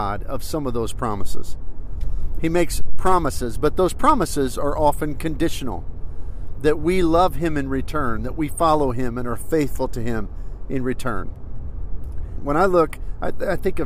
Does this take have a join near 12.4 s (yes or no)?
yes